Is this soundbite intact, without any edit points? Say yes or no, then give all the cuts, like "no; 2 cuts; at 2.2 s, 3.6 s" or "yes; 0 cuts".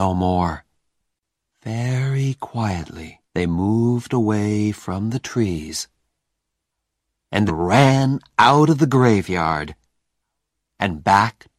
no; 2 cuts; at 3.2 s, 7.5 s